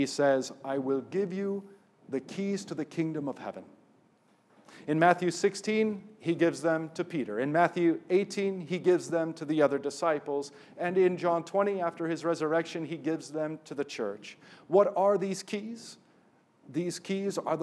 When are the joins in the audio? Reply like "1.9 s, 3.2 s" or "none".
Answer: none